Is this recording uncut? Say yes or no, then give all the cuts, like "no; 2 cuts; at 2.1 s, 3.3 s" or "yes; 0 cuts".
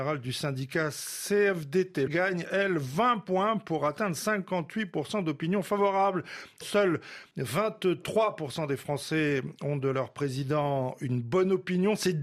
no; 2 cuts; at 2.1 s, 6.6 s